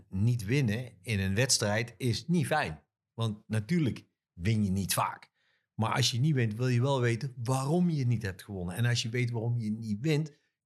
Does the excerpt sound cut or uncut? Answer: uncut